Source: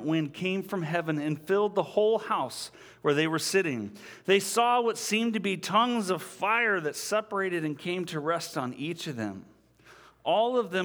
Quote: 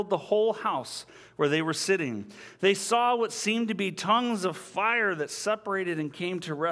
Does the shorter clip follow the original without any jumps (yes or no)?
yes